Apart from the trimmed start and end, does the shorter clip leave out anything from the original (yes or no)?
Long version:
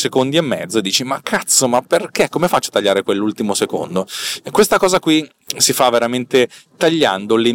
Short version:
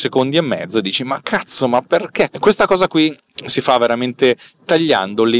yes